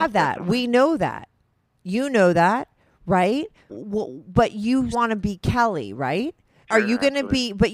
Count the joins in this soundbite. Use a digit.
3